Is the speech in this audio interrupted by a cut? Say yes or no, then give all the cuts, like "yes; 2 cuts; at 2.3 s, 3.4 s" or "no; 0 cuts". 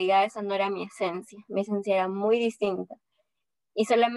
no; 0 cuts